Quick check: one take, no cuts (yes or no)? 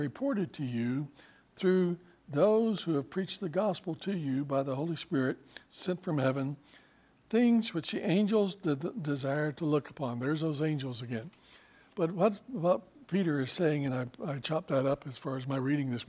yes